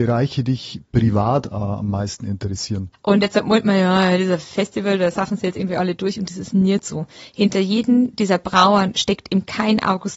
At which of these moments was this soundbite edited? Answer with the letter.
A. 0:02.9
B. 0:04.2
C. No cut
A